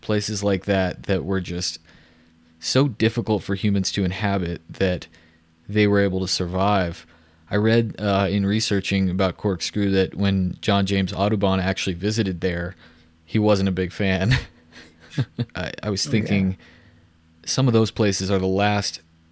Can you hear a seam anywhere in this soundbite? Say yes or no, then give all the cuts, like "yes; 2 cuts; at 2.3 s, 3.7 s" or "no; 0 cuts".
yes; 1 cut; at 15.5 s